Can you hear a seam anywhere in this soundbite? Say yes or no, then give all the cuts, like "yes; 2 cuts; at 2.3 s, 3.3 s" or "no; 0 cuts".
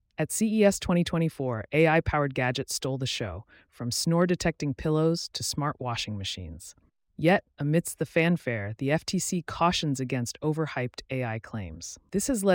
no; 0 cuts